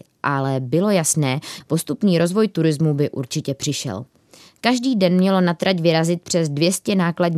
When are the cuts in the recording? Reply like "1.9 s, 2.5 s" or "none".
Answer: 1.6 s